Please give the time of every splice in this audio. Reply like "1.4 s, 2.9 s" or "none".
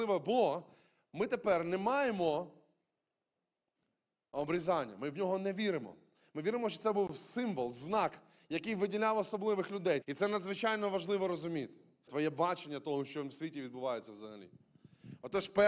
10.0 s, 12.1 s